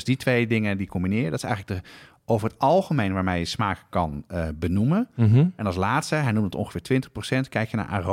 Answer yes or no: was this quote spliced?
no